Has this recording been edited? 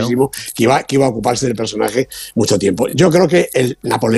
no; 0 cuts

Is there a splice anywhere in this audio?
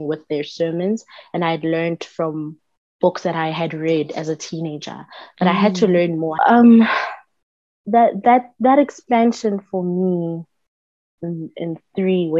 yes; 2 cuts; at 6.4 s, 11.2 s

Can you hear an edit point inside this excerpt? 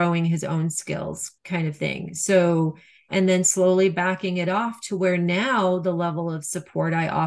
yes; 1 cut; at 3.1 s

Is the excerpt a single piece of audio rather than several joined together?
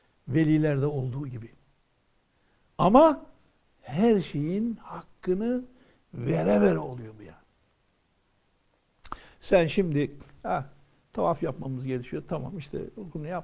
yes; 0 cuts

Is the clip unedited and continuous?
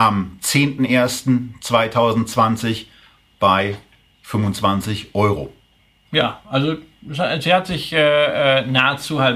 yes; 0 cuts

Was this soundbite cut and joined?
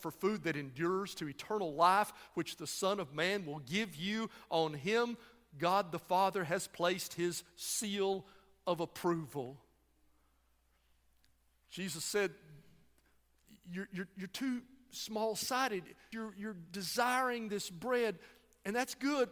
yes; 1 cut; at 16.1 s

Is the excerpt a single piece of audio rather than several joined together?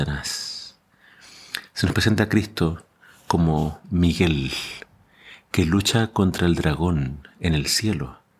yes; 0 cuts

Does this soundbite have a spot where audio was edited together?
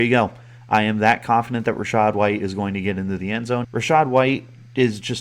yes; 1 cut; at 3.6 s

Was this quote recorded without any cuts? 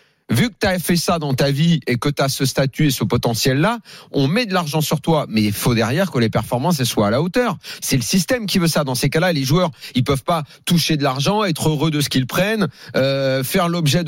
no; 1 cut; at 7.8 s

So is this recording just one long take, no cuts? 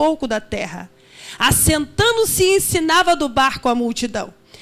yes; 0 cuts

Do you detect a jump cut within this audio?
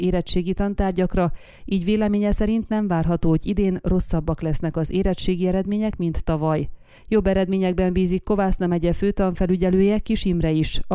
no; 0 cuts

